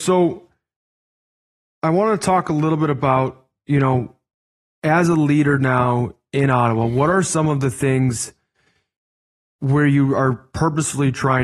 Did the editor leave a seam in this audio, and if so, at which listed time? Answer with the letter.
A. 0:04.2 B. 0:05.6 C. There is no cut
C